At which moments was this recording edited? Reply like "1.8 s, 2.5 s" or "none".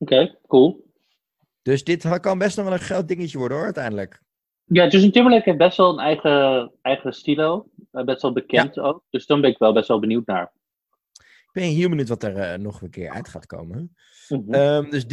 none

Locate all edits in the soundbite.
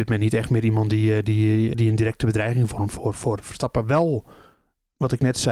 1.7 s

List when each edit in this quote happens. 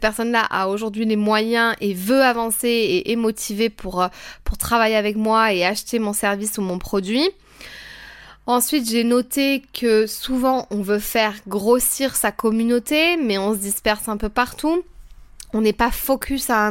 none

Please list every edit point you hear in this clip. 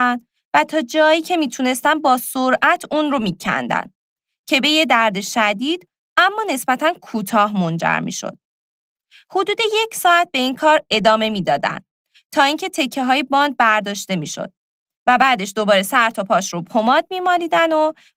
none

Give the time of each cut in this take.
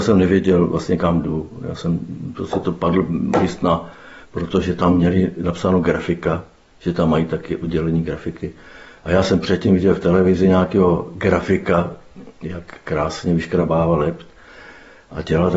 4.2 s

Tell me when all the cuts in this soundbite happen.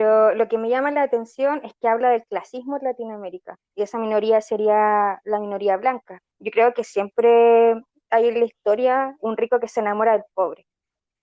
3.7 s, 6.3 s, 9.2 s

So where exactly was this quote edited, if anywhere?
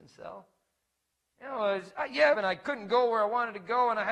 2.3 s

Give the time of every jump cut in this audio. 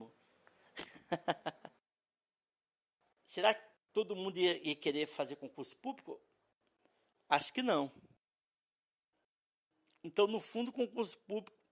none

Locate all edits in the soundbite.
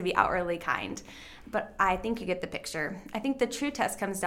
none

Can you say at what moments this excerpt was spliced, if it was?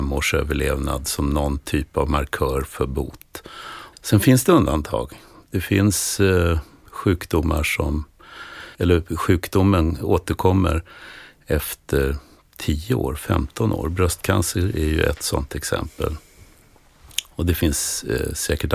3.9 s, 8.7 s

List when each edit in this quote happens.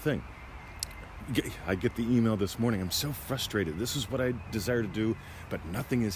none

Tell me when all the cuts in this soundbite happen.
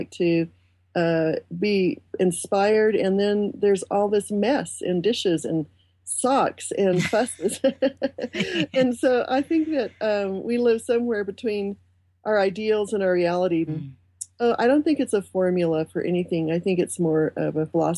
13.7 s

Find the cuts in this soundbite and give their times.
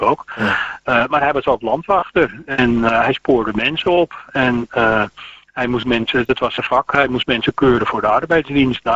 none

